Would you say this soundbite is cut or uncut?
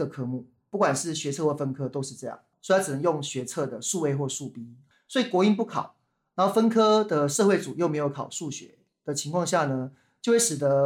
cut